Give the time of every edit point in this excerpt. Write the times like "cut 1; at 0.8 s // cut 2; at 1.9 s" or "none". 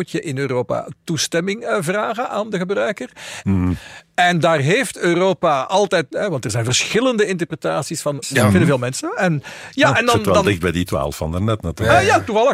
cut 1; at 3.4 s // cut 2; at 6.1 s // cut 3; at 8.2 s